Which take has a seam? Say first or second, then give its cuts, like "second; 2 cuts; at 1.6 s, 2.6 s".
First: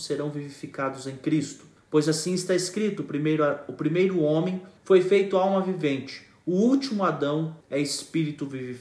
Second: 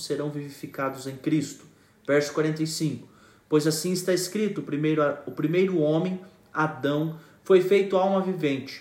first; 3 cuts; at 1.8 s, 4.8 s, 7.6 s